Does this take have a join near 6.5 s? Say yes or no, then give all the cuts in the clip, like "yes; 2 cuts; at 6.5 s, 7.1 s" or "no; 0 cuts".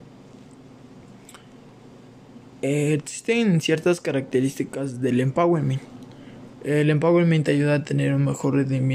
yes; 1 cut; at 6.5 s